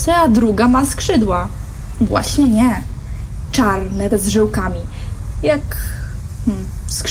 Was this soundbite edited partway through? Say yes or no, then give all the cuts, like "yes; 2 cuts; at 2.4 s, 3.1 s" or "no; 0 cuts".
yes; 3 cuts; at 1.9 s, 4.1 s, 5.3 s